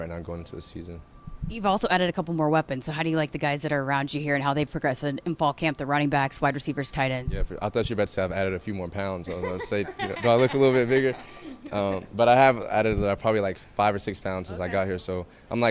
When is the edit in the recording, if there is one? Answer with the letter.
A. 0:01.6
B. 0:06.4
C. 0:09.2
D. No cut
D